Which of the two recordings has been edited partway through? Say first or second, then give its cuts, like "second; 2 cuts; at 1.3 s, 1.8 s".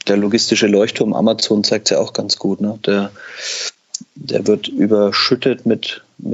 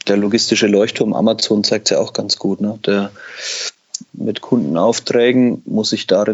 second; 1 cut; at 4.1 s